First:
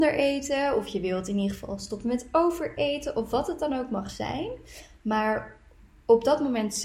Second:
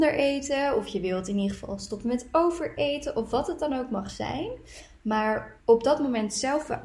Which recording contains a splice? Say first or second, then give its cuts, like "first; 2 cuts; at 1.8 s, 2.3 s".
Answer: second; 1 cut; at 5.6 s